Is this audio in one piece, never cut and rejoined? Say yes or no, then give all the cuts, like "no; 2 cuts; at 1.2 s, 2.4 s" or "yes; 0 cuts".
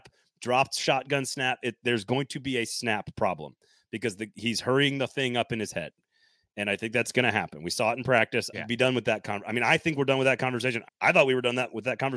no; 2 cuts; at 8.5 s, 10.9 s